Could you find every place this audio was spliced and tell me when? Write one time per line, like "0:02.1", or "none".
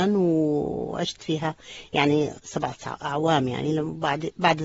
0:02.4